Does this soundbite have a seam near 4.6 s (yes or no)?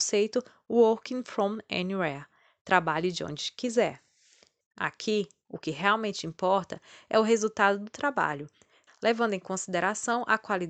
yes